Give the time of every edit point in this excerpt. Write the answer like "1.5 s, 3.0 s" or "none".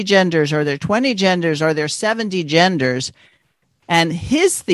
3.8 s